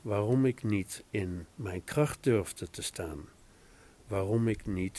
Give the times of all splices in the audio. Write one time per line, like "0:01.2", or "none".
0:01.5